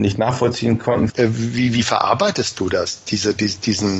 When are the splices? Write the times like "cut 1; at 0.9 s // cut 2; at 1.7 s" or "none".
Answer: cut 1; at 1.1 s